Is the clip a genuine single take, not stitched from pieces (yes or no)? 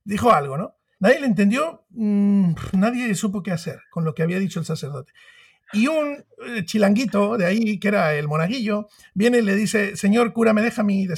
no